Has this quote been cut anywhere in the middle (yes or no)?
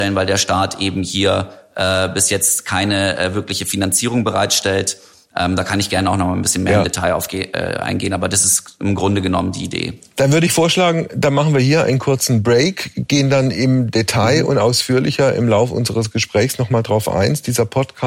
no